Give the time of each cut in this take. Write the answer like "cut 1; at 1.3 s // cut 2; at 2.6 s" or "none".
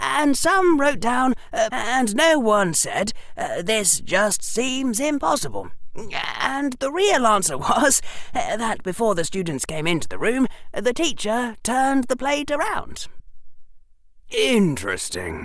cut 1; at 1.7 s